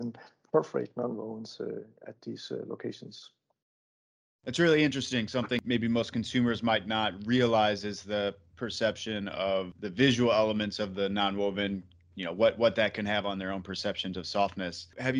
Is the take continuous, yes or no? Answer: yes